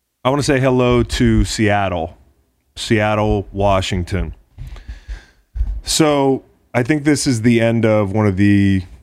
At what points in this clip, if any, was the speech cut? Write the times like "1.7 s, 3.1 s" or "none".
none